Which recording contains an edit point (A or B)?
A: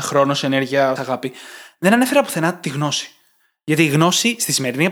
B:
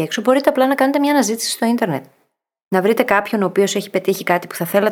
A